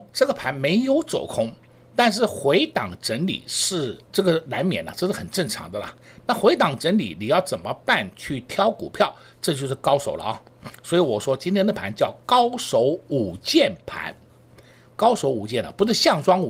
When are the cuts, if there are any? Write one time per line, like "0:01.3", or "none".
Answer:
0:04.1